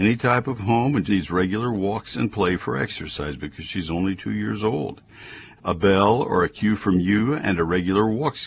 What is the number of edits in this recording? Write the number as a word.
two